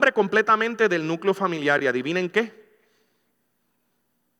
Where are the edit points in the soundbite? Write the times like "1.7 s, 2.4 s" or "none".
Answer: none